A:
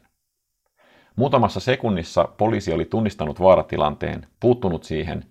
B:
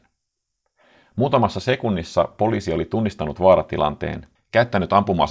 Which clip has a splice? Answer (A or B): B